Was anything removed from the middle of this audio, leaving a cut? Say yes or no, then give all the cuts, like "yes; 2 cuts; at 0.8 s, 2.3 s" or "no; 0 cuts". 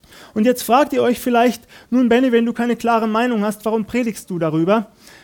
no; 0 cuts